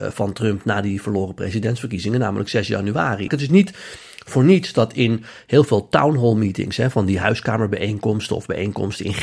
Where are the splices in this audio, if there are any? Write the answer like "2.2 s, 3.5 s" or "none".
3.3 s